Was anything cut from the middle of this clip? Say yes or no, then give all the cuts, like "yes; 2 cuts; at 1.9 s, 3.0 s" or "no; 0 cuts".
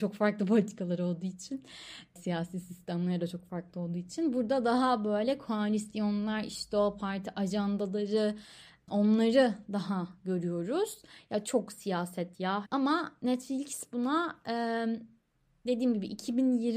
yes; 2 cuts; at 11.4 s, 12.6 s